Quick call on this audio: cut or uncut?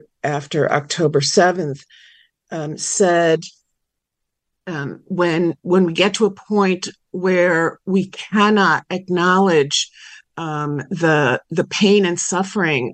uncut